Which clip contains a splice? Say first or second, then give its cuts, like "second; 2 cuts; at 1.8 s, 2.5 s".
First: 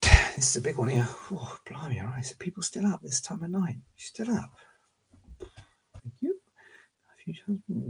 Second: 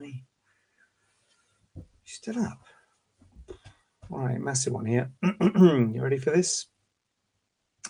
first; 2 cuts; at 3.9 s, 6.0 s